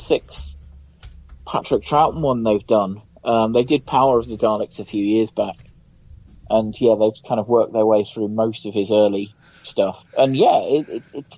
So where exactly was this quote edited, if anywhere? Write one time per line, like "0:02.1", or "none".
none